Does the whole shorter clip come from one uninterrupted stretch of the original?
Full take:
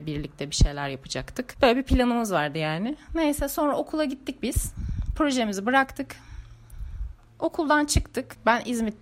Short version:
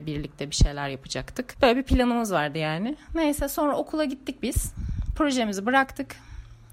yes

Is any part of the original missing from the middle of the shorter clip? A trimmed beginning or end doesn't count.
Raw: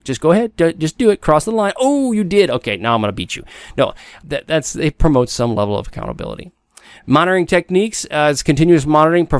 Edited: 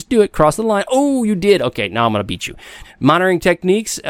yes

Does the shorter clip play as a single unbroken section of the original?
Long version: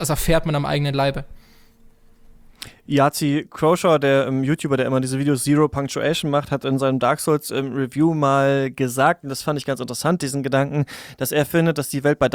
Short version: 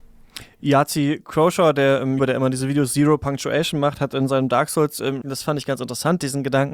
no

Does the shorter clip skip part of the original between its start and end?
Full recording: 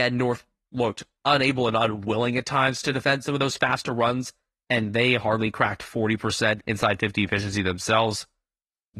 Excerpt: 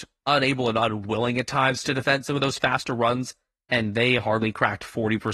no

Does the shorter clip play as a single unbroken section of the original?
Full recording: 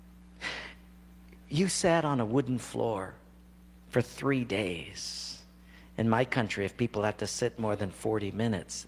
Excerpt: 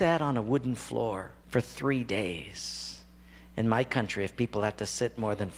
no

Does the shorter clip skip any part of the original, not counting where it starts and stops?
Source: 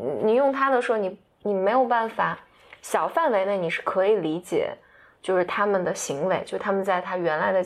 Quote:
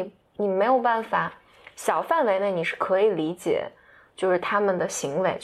no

